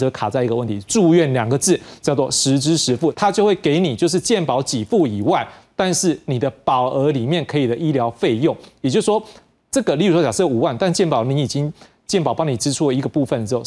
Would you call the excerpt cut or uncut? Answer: cut